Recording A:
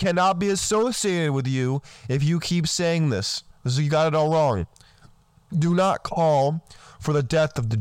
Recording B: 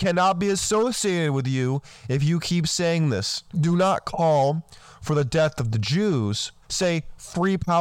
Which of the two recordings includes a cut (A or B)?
B